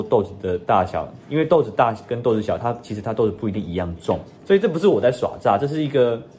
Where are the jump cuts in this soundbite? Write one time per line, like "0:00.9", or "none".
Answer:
0:04.3